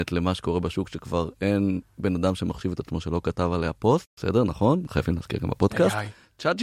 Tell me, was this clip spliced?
no; 0 cuts

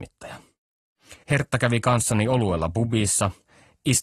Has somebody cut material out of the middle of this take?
yes; 1 cut; at 1.2 s

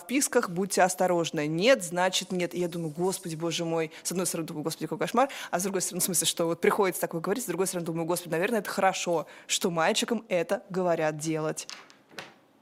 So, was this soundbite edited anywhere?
no; 0 cuts

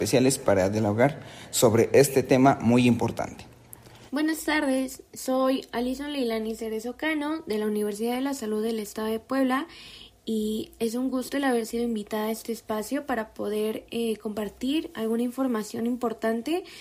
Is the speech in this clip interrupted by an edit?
yes; 1 cut; at 4.1 s

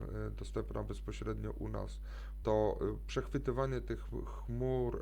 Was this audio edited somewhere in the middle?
yes; 1 cut; at 2.4 s

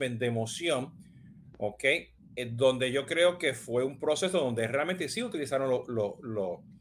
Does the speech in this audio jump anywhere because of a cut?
no; 0 cuts

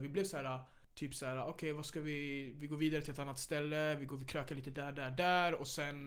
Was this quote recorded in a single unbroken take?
yes; 0 cuts

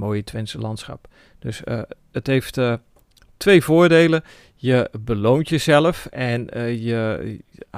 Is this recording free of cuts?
yes; 0 cuts

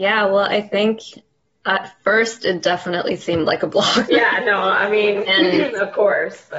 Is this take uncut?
no; 1 cut; at 4.1 s

